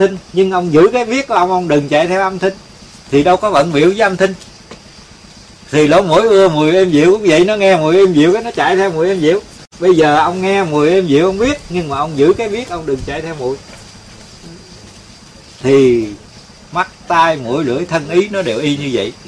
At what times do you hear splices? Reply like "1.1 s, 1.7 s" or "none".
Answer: none